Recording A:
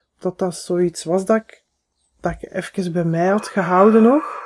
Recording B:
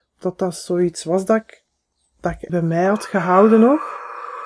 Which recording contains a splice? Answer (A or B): B